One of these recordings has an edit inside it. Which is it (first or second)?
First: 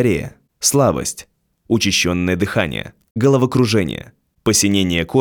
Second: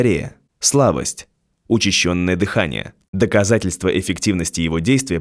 second